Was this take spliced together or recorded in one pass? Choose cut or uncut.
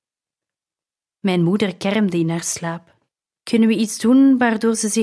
cut